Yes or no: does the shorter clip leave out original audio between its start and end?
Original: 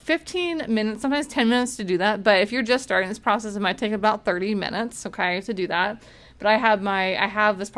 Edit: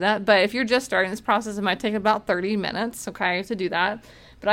no